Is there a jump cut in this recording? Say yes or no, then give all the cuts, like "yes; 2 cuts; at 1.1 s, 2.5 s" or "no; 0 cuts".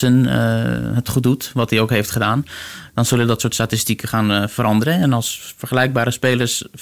no; 0 cuts